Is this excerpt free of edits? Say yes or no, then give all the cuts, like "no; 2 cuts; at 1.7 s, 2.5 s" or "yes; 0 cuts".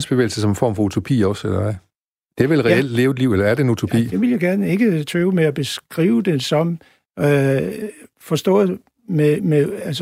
yes; 0 cuts